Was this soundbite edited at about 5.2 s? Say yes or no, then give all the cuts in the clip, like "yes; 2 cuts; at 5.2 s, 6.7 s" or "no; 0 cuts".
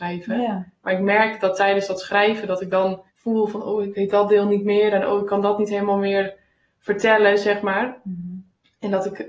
no; 1 cut; at 3.1 s